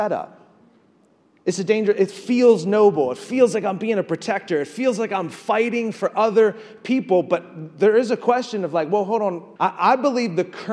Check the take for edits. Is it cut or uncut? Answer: cut